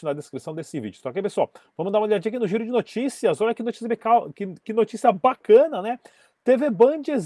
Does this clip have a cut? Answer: no; 0 cuts

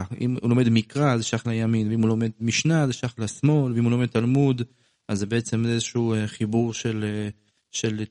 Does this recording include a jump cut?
no; 0 cuts

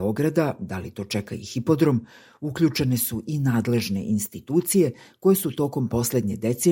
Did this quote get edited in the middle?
no; 0 cuts

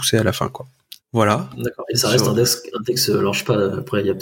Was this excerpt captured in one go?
no; 1 cut; at 1.0 s

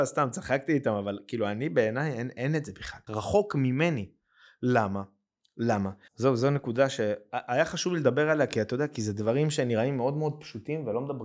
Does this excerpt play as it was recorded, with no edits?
no; 2 cuts; at 3.1 s, 6.1 s

